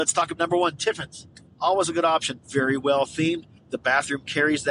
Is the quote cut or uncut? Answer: cut